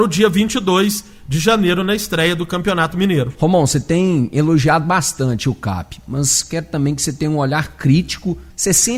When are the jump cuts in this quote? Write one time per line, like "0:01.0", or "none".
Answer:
none